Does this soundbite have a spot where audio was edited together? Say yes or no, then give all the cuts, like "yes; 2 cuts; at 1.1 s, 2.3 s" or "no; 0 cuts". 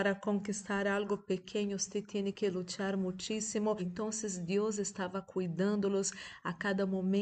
yes; 1 cut; at 3.8 s